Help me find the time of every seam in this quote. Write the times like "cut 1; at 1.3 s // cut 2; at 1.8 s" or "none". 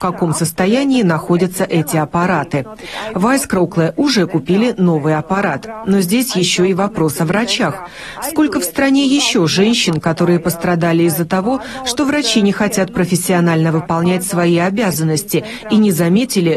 none